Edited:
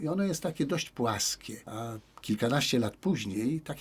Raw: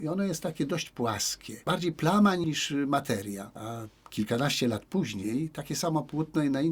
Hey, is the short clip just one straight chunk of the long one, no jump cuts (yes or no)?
no